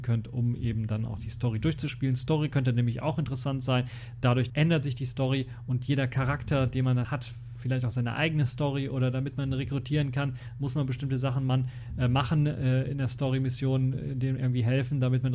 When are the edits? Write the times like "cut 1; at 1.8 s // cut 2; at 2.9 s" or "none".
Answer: cut 1; at 4.5 s // cut 2; at 7.0 s